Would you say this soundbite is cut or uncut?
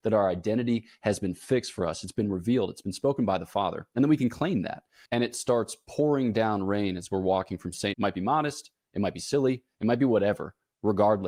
cut